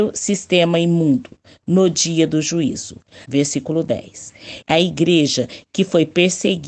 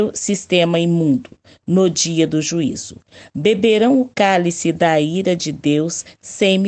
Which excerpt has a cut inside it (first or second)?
first